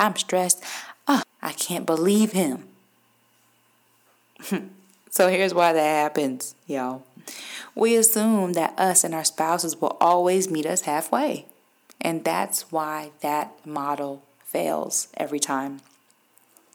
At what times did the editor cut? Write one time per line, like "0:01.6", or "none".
0:01.2